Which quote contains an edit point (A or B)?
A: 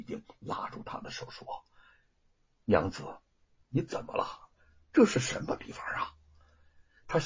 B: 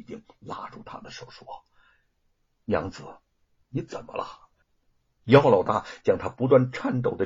B